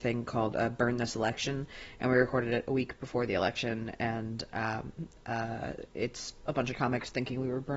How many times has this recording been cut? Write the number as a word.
zero